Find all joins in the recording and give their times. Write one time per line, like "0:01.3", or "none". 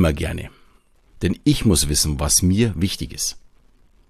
0:01.1